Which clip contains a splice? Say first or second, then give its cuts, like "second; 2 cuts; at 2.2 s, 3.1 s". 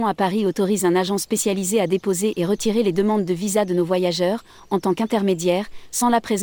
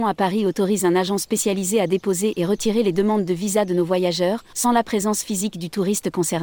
second; 1 cut; at 4.5 s